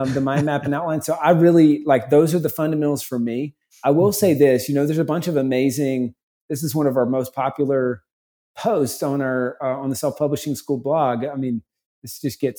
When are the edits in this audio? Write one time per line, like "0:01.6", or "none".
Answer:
none